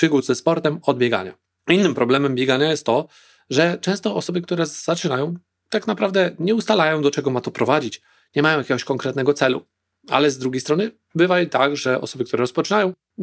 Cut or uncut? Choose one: uncut